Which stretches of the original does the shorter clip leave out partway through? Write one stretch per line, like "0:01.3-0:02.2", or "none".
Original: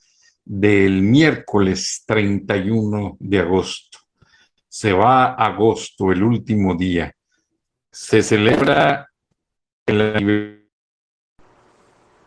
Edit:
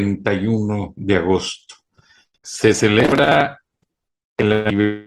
0:04.6-0:07.9